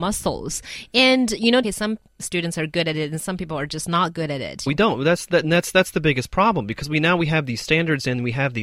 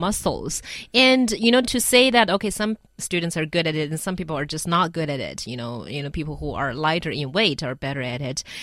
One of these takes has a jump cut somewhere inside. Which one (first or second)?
first